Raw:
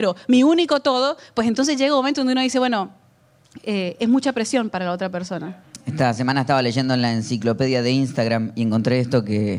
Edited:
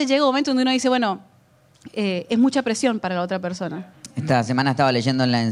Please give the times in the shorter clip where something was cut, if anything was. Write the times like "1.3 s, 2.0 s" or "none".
none